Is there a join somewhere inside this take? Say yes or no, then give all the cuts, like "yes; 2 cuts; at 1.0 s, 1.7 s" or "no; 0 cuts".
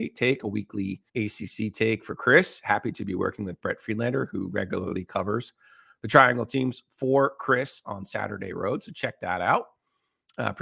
yes; 1 cut; at 1.1 s